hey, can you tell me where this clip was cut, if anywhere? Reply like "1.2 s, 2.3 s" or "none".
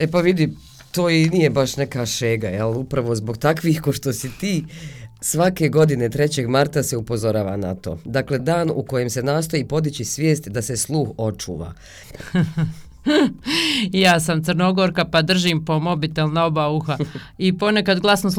8.4 s, 12.0 s